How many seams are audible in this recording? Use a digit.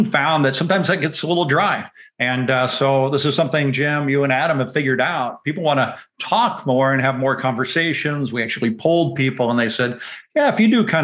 0